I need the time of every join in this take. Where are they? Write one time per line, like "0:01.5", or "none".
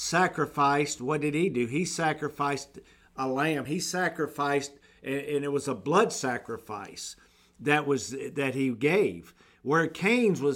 none